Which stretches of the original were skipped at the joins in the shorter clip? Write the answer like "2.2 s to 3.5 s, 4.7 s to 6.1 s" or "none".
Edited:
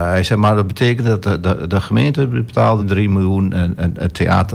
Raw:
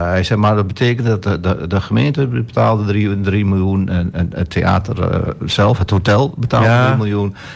2.8 s to 3.2 s